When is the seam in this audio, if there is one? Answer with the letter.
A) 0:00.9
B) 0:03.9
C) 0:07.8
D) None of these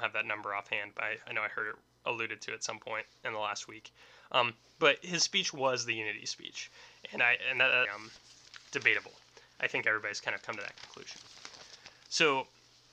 C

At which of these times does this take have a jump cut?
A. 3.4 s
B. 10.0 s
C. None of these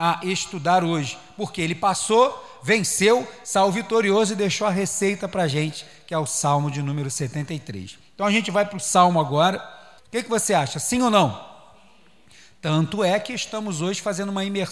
B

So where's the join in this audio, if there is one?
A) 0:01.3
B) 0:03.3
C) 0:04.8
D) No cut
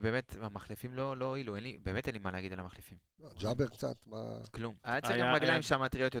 C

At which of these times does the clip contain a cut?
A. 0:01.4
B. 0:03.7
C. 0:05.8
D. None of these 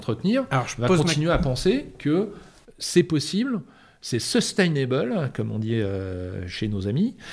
D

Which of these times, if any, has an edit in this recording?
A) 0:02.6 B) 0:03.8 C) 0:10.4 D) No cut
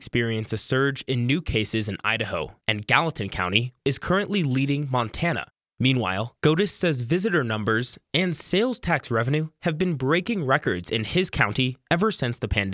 B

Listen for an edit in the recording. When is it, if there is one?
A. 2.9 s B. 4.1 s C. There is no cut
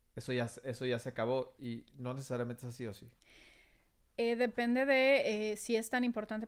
B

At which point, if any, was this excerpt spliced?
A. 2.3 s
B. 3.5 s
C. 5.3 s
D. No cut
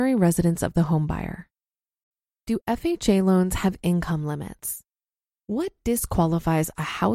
C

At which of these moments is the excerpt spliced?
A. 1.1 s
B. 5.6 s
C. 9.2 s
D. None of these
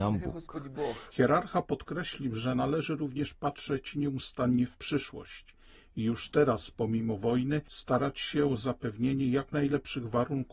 A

